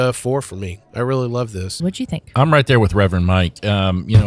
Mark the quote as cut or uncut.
cut